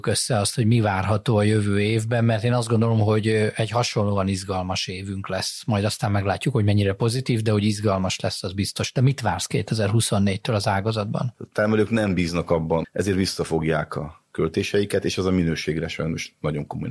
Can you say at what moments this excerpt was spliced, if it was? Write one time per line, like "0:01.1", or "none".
0:11.3
0:12.8